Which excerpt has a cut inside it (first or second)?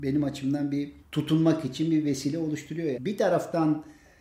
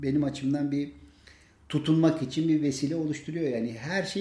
first